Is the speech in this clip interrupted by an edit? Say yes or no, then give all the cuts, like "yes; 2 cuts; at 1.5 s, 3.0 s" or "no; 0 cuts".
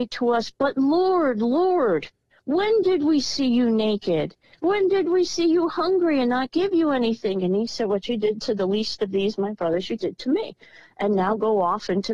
no; 0 cuts